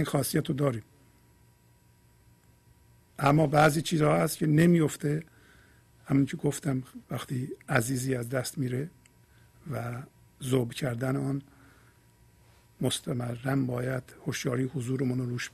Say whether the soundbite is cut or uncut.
cut